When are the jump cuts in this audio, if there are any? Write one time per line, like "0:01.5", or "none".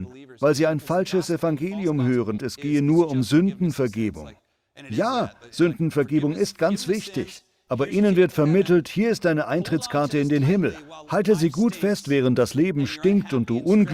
0:02.4